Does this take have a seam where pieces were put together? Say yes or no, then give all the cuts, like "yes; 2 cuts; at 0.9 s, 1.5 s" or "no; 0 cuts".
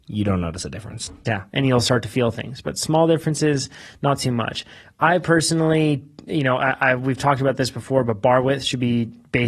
yes; 1 cut; at 1.2 s